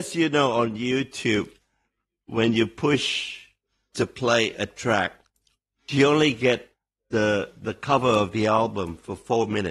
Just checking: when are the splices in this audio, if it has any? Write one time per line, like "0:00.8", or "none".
none